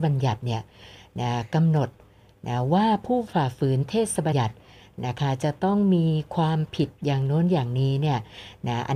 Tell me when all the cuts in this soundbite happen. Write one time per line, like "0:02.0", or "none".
0:04.3